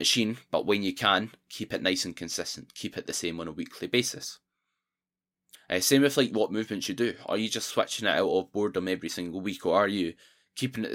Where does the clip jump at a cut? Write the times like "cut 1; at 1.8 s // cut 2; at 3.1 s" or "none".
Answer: cut 1; at 5.5 s